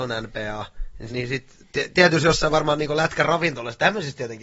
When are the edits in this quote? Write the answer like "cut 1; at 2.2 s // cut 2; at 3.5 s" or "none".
cut 1; at 1.1 s